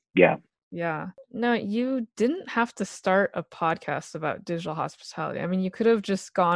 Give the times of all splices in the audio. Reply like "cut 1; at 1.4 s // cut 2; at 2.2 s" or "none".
none